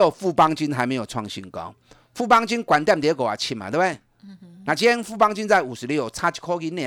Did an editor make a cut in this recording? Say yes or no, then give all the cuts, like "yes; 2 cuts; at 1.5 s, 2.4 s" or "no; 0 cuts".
no; 0 cuts